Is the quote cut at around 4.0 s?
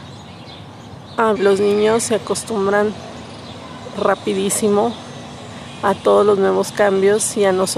yes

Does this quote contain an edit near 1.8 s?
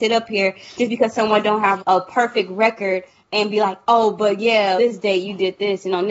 yes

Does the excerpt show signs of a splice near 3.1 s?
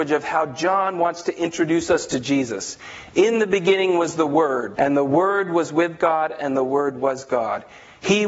no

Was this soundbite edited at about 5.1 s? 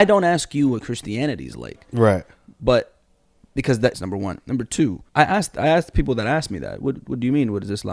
yes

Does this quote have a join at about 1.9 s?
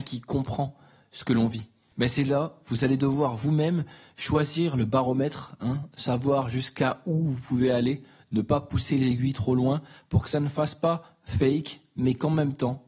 yes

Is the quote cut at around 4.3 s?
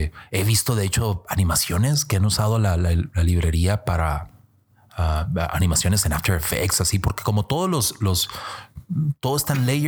no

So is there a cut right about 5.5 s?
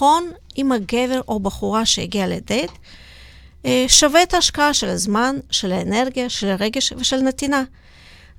no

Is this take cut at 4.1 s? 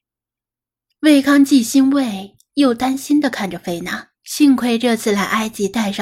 yes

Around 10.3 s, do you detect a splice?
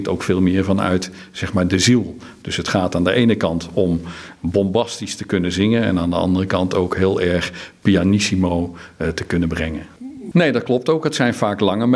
yes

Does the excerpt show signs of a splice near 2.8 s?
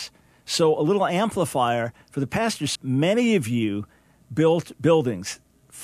yes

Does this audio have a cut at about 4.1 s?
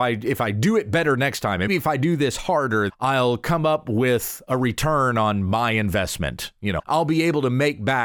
no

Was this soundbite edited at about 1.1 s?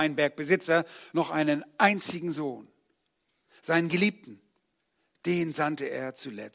no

